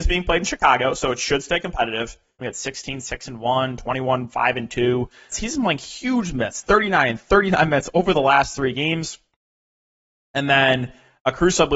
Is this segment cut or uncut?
cut